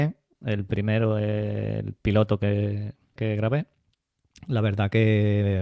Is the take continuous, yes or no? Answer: no